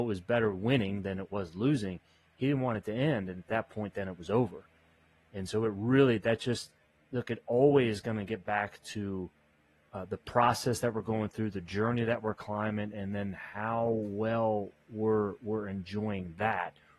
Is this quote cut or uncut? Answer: uncut